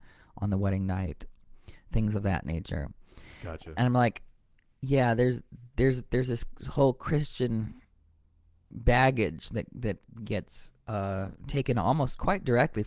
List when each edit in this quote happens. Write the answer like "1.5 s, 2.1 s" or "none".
10.8 s